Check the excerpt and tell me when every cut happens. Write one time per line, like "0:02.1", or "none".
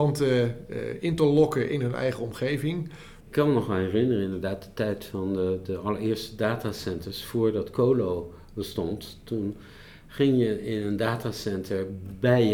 0:03.2